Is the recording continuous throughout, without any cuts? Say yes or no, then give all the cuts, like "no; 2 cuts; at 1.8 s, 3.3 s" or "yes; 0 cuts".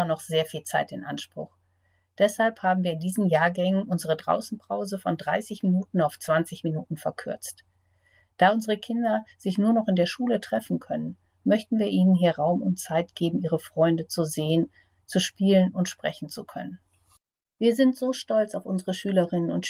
yes; 0 cuts